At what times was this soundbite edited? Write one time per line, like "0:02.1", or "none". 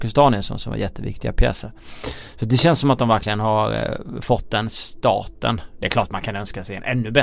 none